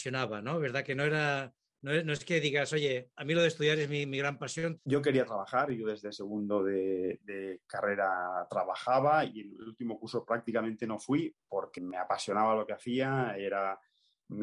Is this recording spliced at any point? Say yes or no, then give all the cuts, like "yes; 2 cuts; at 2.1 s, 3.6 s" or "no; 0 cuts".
yes; 2 cuts; at 4.8 s, 11.8 s